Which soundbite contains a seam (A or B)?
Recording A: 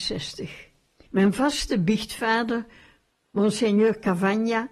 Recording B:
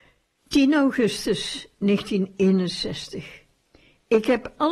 A